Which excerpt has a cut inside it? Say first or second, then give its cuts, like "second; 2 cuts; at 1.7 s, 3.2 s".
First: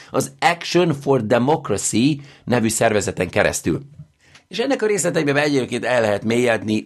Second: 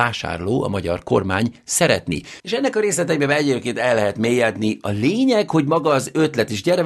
second; 1 cut; at 2.4 s